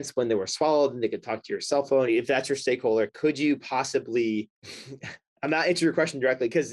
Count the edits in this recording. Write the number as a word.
two